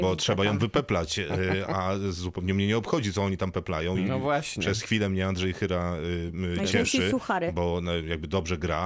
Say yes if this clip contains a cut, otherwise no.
no